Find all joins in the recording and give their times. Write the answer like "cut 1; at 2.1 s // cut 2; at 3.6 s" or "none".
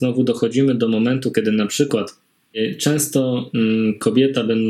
none